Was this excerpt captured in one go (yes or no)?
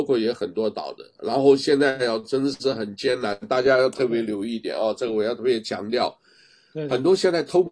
yes